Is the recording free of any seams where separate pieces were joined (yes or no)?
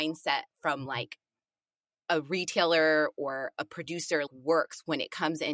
no